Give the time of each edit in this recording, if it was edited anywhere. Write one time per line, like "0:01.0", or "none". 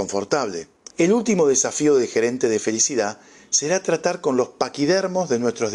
0:00.9